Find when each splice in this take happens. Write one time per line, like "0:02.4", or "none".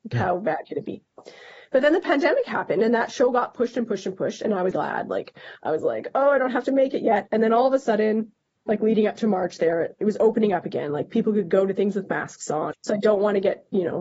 0:04.7
0:08.6
0:12.7